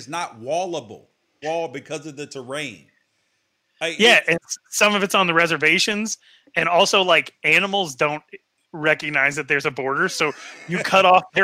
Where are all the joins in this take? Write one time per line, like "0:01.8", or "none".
0:01.4